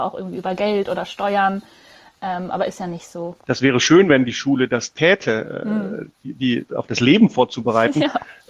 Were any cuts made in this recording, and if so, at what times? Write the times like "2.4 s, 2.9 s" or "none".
3.4 s, 6.7 s